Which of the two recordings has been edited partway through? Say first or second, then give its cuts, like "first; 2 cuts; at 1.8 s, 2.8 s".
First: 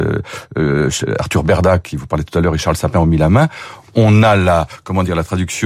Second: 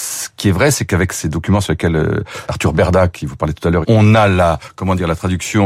second; 2 cuts; at 2.5 s, 3.8 s